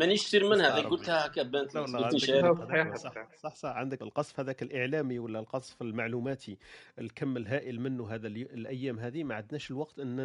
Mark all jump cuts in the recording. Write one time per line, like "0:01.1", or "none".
0:01.7
0:04.0